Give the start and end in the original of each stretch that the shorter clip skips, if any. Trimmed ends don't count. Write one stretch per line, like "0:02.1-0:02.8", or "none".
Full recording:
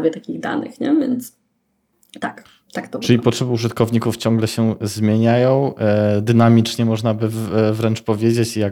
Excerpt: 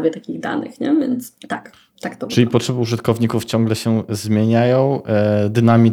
0:01.4-0:02.1